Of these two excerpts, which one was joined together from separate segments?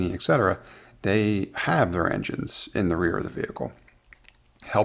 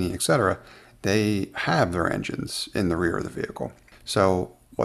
second; 1 cut; at 3.9 s

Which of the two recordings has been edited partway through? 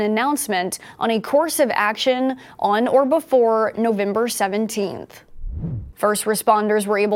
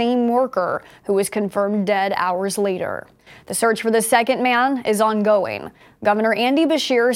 first; 1 cut; at 5.9 s

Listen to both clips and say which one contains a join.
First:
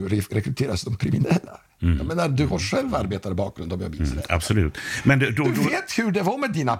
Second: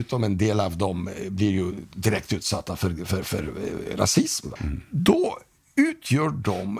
second; 1 cut; at 4.6 s

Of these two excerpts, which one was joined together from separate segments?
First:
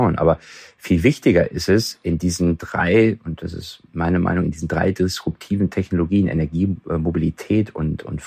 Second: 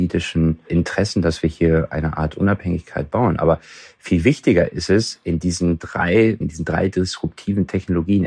second; 1 cut; at 6.4 s

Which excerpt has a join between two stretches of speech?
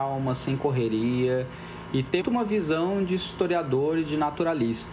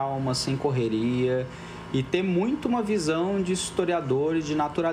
first; 1 cut; at 2.2 s

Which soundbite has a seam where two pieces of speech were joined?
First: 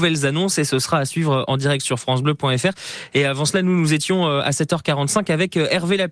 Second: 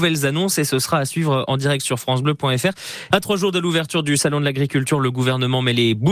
second; 1 cut; at 3.1 s

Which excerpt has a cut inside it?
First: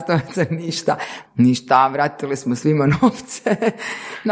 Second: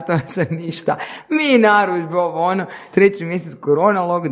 first; 1 cut; at 1.3 s

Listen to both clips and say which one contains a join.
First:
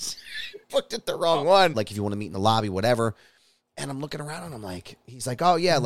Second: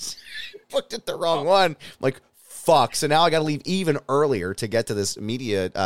first; 1 cut; at 1.7 s

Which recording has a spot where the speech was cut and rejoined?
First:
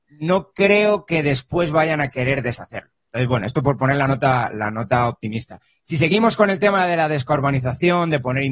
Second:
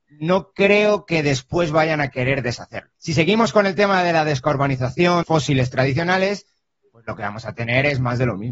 second; 2 cuts; at 3.0 s, 5.2 s

